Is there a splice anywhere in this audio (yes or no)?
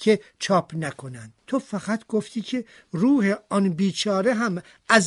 yes